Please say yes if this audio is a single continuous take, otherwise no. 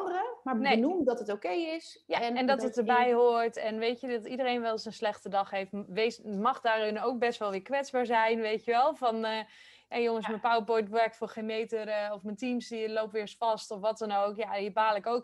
yes